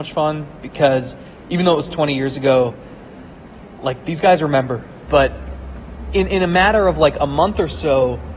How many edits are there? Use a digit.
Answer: 1